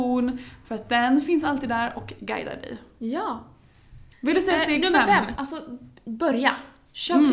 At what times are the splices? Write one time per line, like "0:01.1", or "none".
0:04.1
0:05.4